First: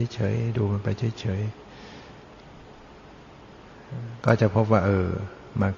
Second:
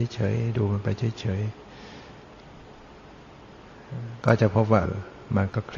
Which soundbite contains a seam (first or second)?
second